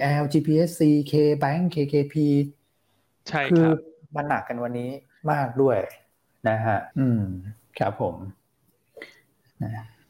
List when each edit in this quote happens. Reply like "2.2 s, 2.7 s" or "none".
6.9 s